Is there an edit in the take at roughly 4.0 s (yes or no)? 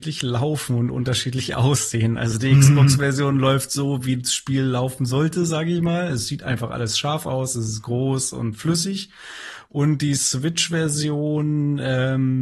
no